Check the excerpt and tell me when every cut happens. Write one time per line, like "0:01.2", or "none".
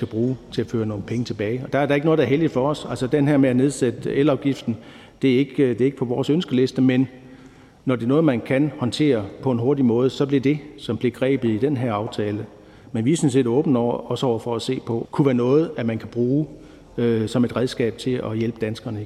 0:10.4
0:15.0